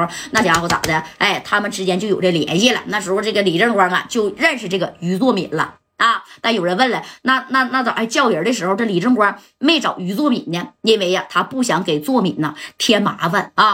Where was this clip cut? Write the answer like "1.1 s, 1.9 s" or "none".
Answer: none